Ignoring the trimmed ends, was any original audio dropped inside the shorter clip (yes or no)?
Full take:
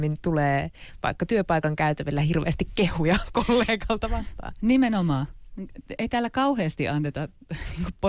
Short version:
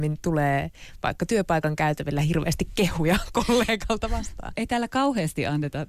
yes